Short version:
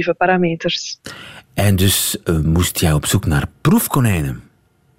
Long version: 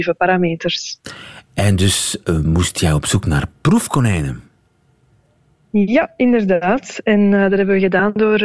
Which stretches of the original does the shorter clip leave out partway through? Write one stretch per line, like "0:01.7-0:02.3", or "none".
none